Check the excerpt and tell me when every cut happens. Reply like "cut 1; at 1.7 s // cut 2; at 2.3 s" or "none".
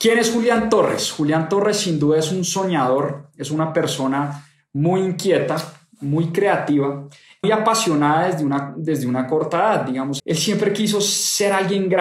cut 1; at 7.4 s // cut 2; at 10.2 s